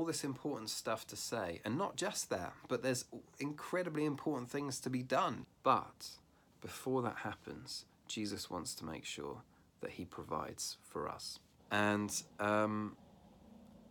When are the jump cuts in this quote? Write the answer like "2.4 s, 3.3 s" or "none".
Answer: 5.4 s, 11.6 s